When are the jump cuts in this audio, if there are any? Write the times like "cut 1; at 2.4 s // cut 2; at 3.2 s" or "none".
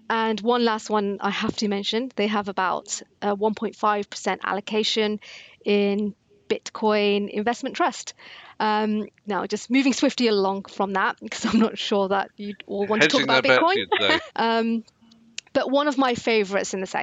cut 1; at 9.1 s // cut 2; at 14.3 s